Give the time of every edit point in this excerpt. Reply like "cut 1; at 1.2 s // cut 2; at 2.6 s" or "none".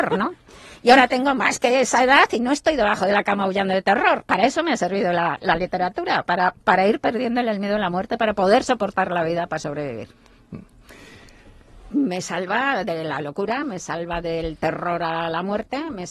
cut 1; at 11.9 s // cut 2; at 13.6 s

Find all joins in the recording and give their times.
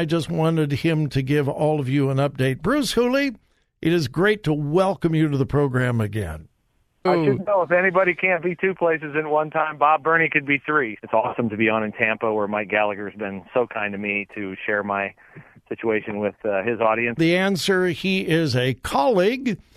cut 1; at 7.1 s // cut 2; at 11.0 s // cut 3; at 17.2 s

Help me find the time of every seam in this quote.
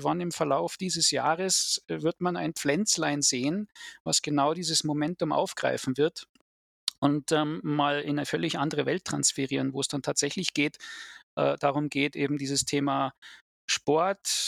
none

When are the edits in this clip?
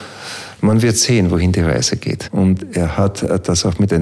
cut 1; at 2.3 s

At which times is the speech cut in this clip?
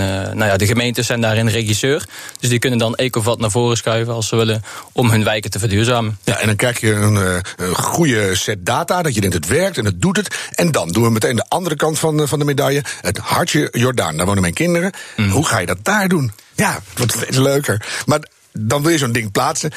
cut 1; at 16.5 s

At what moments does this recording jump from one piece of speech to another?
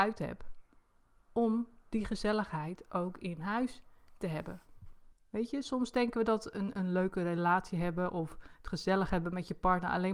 cut 1; at 5.1 s

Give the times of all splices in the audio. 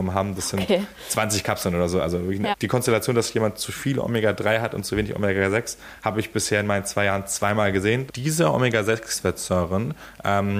cut 1; at 2.5 s // cut 2; at 8.1 s

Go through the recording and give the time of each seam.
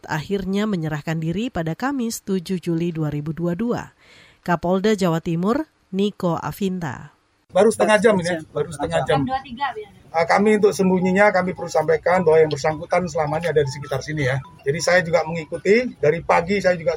none

